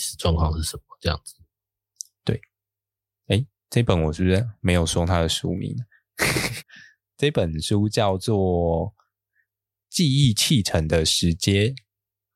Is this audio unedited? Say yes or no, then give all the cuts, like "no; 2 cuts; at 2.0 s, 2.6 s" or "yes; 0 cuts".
no; 1 cut; at 6.6 s